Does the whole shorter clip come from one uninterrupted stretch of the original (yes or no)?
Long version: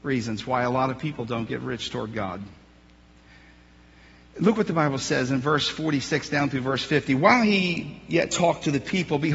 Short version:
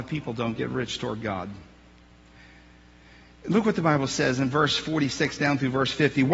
yes